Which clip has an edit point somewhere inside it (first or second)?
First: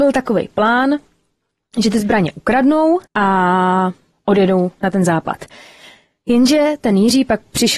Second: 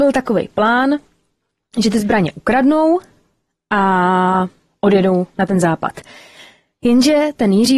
first